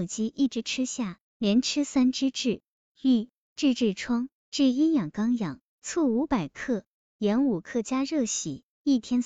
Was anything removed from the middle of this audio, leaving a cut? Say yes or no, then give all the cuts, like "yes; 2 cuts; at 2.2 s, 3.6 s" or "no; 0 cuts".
yes; 1 cut; at 4.4 s